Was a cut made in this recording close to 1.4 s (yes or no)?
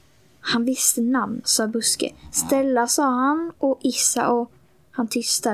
yes